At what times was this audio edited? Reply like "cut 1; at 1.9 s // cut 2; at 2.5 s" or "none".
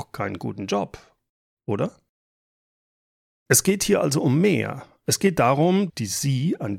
cut 1; at 5.9 s